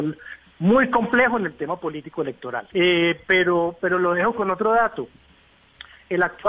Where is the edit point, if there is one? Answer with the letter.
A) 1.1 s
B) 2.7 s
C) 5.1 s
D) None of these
B